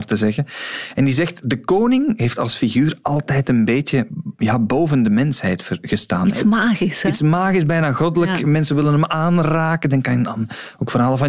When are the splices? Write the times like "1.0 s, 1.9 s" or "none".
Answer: none